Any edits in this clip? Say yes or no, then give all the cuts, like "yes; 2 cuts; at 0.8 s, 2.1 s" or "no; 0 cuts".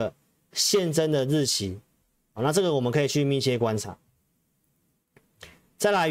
yes; 1 cut; at 2.2 s